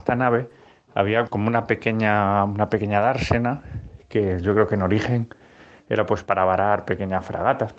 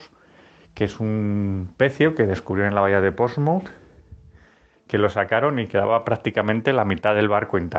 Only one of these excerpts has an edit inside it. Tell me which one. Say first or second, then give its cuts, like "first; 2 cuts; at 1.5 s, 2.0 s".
first; 1 cut; at 1.3 s